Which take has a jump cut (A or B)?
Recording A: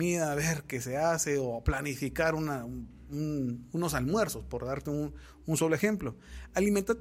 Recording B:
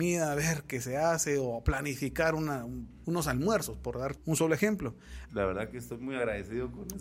B